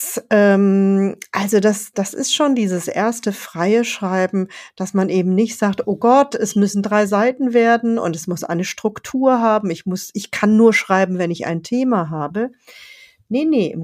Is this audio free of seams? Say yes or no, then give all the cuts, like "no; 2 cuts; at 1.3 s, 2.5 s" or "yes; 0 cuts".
yes; 0 cuts